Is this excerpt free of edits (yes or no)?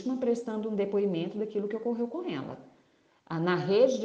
yes